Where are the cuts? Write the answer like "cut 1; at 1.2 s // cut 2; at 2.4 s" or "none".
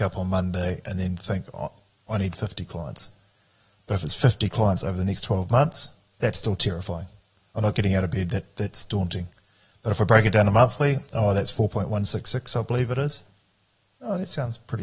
none

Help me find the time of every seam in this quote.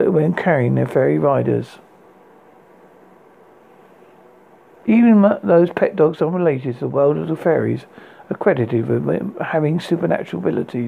none

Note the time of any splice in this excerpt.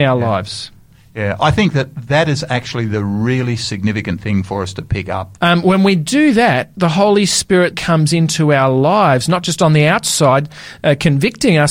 cut 1; at 5.4 s // cut 2; at 7.7 s

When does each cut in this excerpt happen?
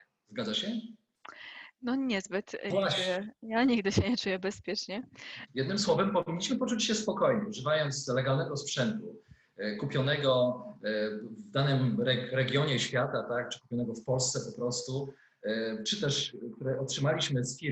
cut 1; at 2.7 s // cut 2; at 5.5 s

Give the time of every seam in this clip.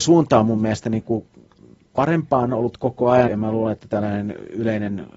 cut 1; at 3.3 s

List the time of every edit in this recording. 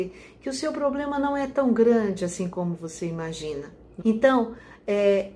cut 1; at 4.0 s

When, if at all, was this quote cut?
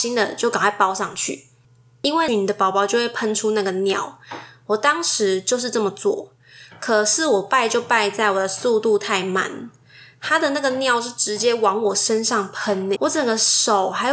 cut 1; at 2.3 s // cut 2; at 13.0 s

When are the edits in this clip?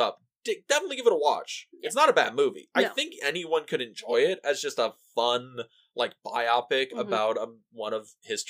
none

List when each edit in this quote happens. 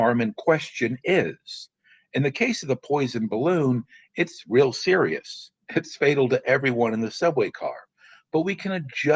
none

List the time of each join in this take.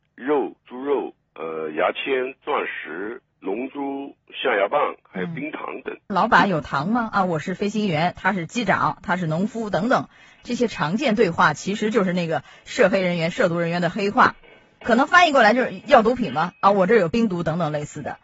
cut 1; at 6.1 s

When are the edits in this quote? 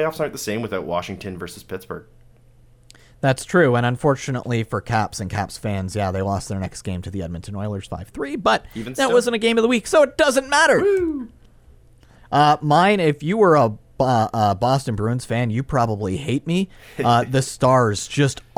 none

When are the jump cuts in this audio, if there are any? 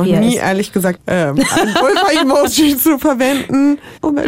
cut 1; at 1.0 s

